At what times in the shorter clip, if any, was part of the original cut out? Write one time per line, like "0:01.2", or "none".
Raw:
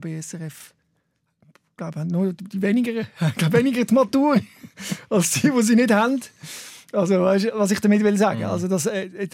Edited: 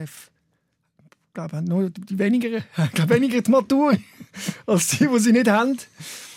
none